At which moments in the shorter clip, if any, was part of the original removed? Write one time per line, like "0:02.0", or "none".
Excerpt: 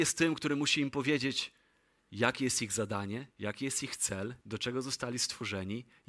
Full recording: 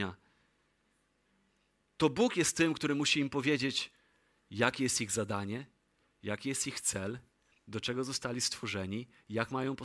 0:03.3
0:04.4

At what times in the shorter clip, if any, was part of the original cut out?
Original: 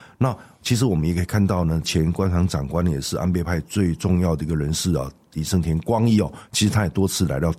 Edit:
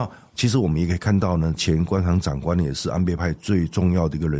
none

